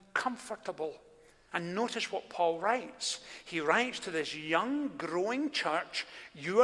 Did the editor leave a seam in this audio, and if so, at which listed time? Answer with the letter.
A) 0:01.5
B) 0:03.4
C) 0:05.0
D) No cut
A